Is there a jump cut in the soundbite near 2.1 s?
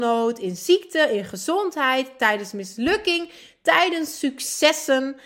no; 0 cuts

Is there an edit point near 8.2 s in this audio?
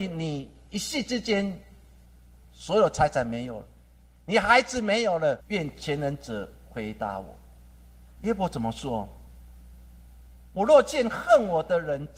yes; 2 cuts; at 5.4 s, 8.2 s

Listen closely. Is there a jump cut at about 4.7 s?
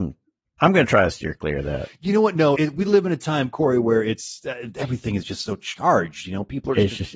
yes; 2 cuts; at 2.5 s, 4.7 s

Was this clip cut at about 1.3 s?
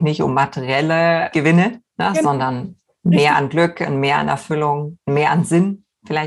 yes; 1 cut; at 1.3 s

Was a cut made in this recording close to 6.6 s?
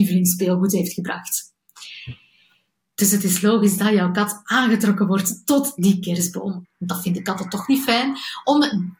yes; 1 cut; at 6.6 s

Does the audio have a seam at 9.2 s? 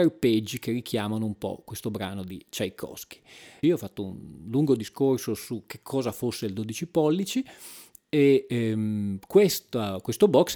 no; 1 cut; at 3.6 s

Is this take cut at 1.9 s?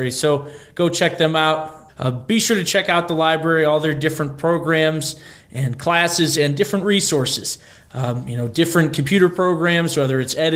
yes; 1 cut; at 1.9 s

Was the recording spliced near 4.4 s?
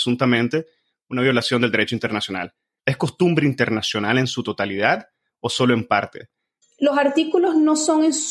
no; 2 cuts; at 2.8 s, 6.6 s

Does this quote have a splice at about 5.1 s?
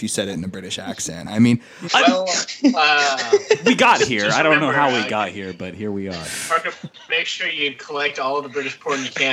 no; 1 cut; at 1.9 s

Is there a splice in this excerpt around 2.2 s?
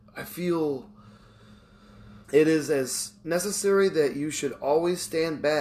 yes; 1 cut; at 2.2 s

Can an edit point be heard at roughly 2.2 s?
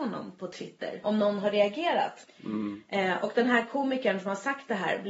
yes; 2 cuts; at 1.0 s, 2.2 s

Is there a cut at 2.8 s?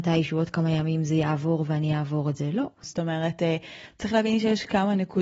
yes; 1 cut; at 2.8 s

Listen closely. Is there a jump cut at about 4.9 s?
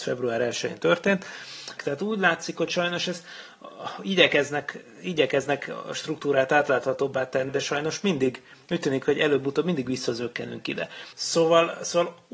no; 3 cuts; at 1.8 s, 7.5 s, 11.1 s

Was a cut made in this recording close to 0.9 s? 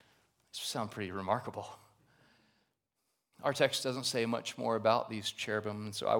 no; 0 cuts

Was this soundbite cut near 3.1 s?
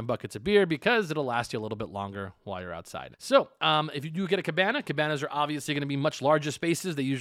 yes; 1 cut; at 3.1 s

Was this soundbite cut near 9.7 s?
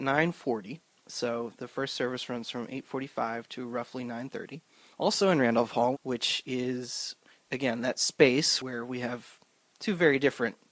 no; 2 cuts; at 4.9 s, 5.9 s

